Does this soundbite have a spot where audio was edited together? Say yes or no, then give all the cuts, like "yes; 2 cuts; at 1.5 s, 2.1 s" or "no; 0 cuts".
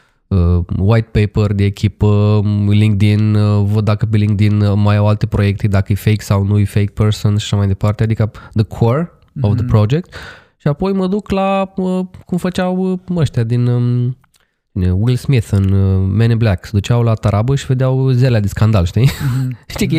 no; 0 cuts